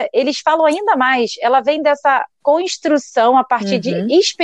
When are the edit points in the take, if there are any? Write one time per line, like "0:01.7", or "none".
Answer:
none